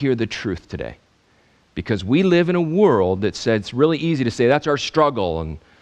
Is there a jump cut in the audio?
no; 0 cuts

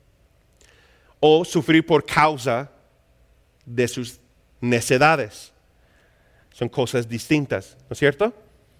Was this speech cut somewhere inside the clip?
yes; 1 cut; at 6.4 s

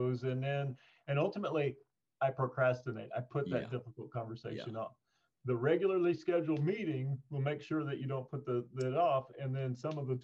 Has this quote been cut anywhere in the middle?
no; 0 cuts

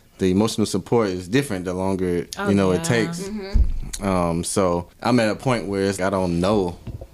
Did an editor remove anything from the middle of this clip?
yes; 2 cuts; at 4.9 s, 6.0 s

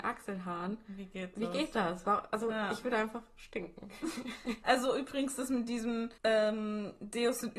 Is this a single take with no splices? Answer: no; 2 cuts; at 4.6 s, 6.2 s

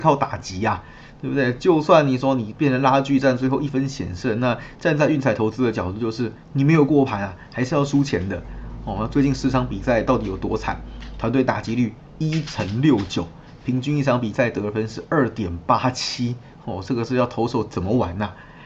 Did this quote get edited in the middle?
no; 0 cuts

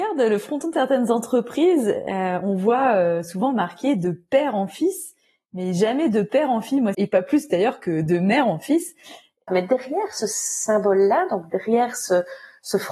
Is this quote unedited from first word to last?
no; 2 cuts; at 6.9 s, 9.5 s

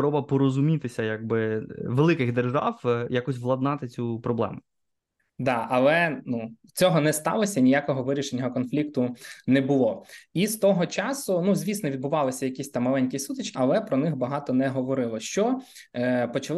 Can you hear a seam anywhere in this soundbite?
yes; 1 cut; at 13.5 s

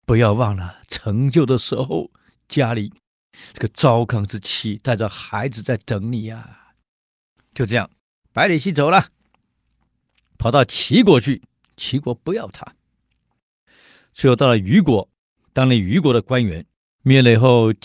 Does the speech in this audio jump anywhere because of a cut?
yes; 1 cut; at 16.8 s

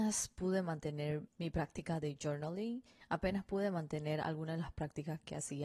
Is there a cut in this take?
yes; 1 cut; at 1.3 s

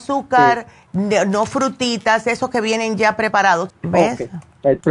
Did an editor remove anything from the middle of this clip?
yes; 1 cut; at 3.7 s

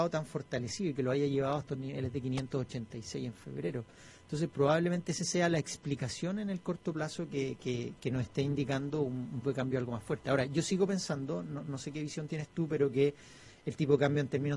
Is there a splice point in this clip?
yes; 2 cuts; at 8.0 s, 9.4 s

